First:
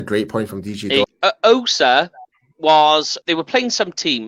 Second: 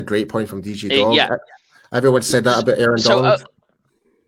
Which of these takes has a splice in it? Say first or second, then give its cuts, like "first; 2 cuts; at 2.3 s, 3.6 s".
first; 2 cuts; at 1.0 s, 3.2 s